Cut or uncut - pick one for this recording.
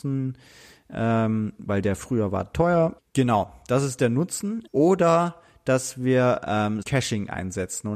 cut